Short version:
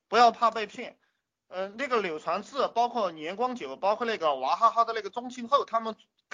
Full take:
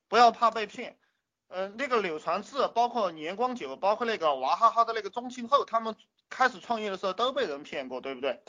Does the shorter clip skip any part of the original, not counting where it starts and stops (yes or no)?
no